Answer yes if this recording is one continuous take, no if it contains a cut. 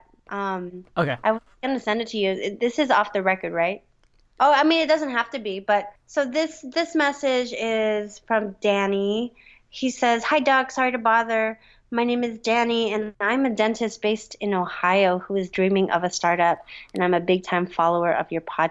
no